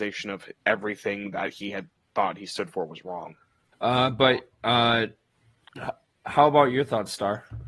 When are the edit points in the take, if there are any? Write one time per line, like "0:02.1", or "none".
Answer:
0:03.7